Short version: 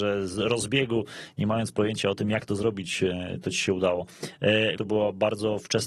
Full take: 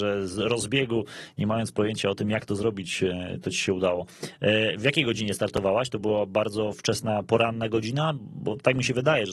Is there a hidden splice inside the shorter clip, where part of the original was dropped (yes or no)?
yes